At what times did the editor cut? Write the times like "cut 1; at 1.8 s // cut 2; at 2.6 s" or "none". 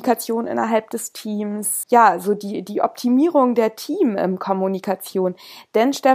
cut 1; at 1.8 s